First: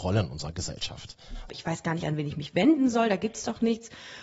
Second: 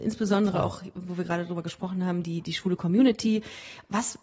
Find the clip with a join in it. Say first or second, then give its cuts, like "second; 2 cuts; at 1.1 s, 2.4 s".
first; 1 cut; at 1.5 s